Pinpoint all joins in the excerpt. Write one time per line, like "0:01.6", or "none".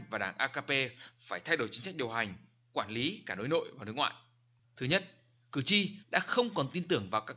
0:04.6
0:06.0